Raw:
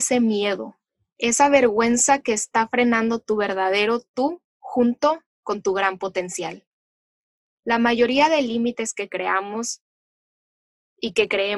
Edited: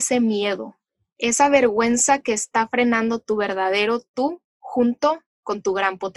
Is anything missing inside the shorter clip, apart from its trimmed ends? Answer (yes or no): no